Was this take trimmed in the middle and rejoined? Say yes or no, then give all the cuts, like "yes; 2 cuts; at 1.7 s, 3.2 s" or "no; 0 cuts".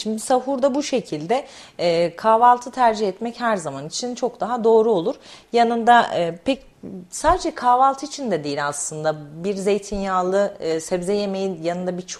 no; 0 cuts